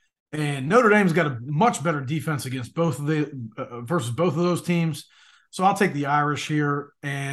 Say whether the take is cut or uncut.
uncut